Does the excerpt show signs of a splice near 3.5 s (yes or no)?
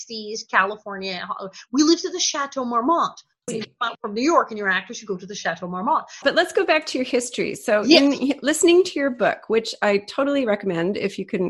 yes